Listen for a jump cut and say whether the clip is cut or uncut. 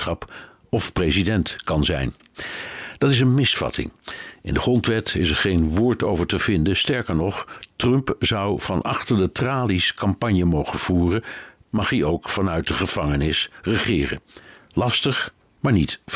cut